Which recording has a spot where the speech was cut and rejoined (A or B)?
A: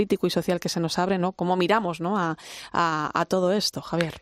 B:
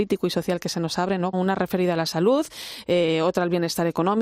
B